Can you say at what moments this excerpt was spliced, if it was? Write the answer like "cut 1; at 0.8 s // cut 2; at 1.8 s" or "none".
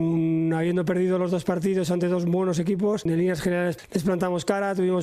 cut 1; at 3.1 s